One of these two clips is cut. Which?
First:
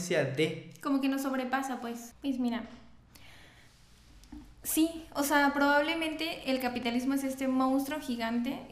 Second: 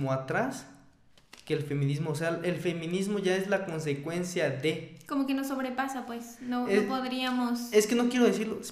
first; 1 cut; at 2.1 s

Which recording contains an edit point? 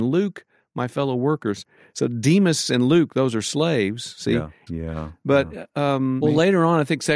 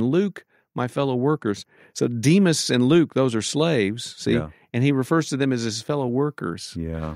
first; 2 cuts; at 4.7 s, 6.2 s

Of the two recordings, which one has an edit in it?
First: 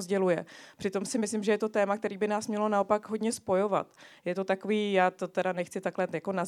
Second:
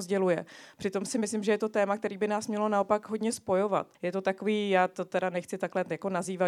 second; 1 cut; at 3.9 s

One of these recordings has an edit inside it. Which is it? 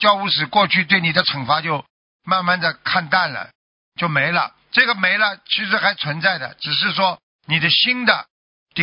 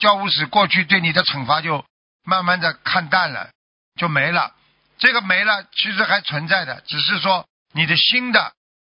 first; 1 cut; at 4.6 s

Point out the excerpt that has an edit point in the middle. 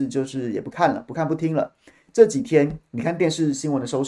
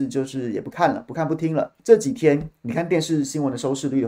second; 1 cut; at 1.8 s

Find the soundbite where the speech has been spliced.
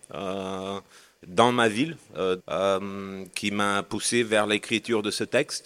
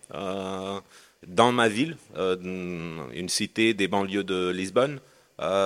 first; 1 cut; at 2.4 s

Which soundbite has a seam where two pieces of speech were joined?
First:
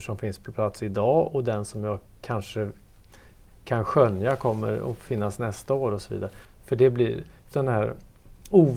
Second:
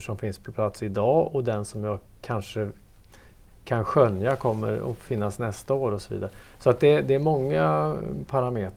first; 2 cuts; at 6.4 s, 7.5 s

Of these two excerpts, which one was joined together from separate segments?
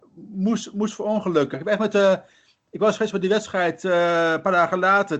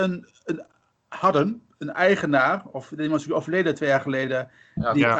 first; 1 cut; at 1.5 s

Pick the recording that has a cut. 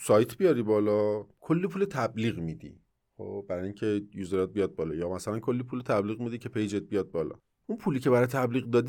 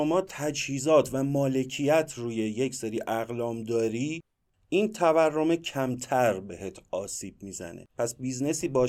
second; 1 cut; at 7.9 s

